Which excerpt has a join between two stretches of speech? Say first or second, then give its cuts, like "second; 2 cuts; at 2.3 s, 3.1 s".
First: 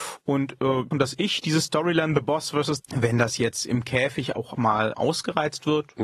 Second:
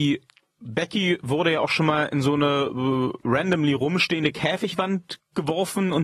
first; 3 cuts; at 0.9 s, 2.8 s, 4.9 s